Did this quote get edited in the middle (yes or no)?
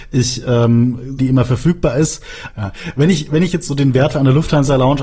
yes